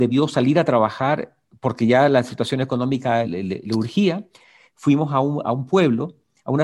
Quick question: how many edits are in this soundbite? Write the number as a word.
zero